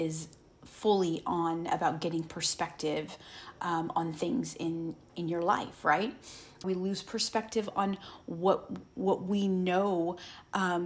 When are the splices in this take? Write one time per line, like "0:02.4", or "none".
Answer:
0:06.6

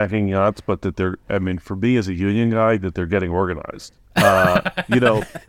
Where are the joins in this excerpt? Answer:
0:04.0

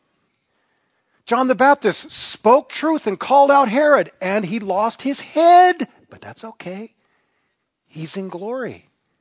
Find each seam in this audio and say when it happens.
0:01.1

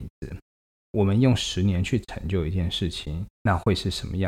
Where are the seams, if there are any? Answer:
0:03.3

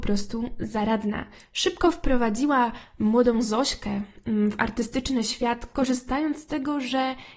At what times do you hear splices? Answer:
none

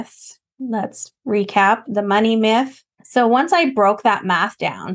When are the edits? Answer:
0:02.9

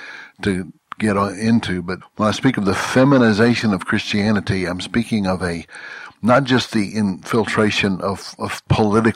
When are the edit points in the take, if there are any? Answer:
0:02.0

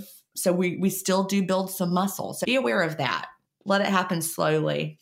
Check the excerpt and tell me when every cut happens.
0:02.4

